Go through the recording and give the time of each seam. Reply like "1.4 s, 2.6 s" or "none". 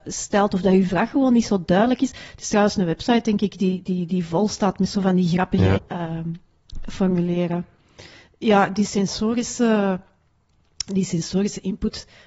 5.7 s

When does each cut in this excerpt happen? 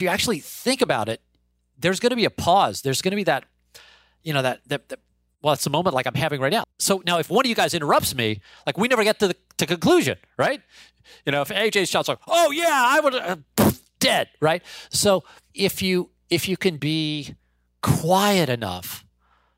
6.6 s, 16.8 s

